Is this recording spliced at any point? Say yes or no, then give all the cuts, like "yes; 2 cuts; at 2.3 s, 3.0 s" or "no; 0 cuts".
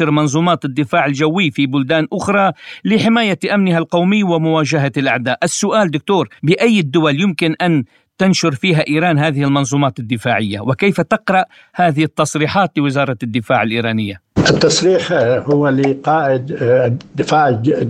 yes; 1 cut; at 6.4 s